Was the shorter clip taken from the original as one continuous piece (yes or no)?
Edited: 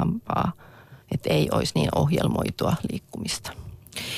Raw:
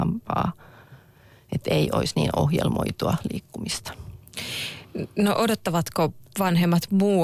no